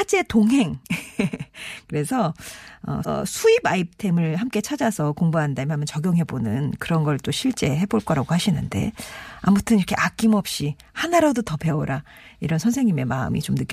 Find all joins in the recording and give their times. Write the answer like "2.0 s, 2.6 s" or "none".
3.0 s